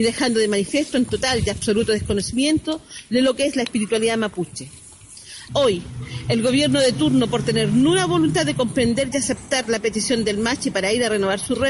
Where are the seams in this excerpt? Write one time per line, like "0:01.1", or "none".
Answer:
0:05.5